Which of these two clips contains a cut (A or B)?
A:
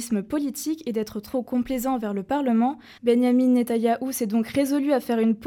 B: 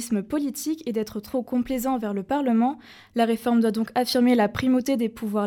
A